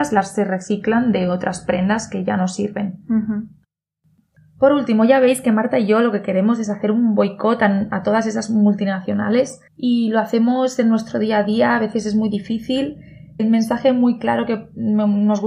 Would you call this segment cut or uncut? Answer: cut